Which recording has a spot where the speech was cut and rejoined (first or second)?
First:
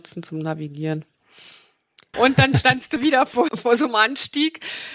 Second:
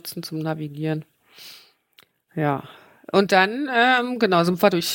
first